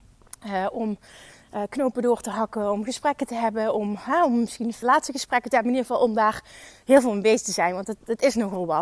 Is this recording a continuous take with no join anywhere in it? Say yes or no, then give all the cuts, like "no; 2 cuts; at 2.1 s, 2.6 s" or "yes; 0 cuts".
no; 1 cut; at 4.8 s